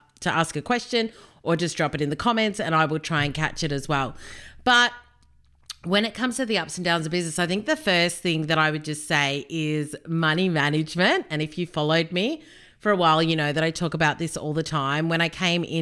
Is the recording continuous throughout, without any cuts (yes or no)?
yes